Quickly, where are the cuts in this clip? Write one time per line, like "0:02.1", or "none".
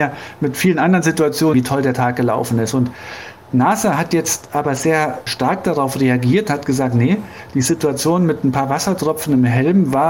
0:01.5